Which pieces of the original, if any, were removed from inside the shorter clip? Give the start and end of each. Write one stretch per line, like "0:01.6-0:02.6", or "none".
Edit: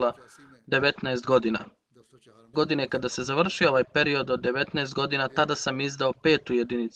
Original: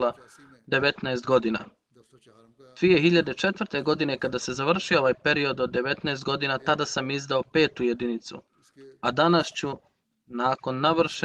0:02.5-0:03.8